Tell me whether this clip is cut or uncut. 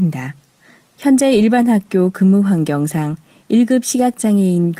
cut